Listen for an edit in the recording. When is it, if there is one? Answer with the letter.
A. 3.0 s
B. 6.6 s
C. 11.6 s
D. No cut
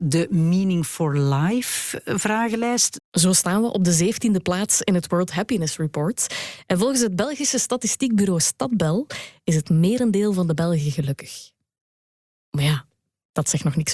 A